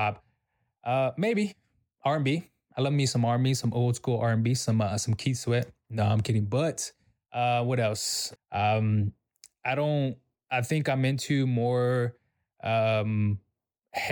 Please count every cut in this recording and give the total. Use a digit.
1